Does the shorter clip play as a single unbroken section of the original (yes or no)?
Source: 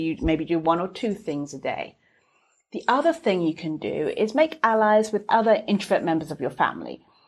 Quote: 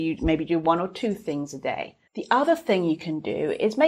no